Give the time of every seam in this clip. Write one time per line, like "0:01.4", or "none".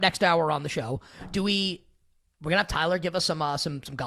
none